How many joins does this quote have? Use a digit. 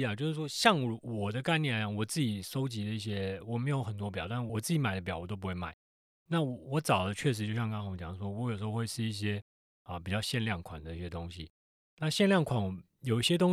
1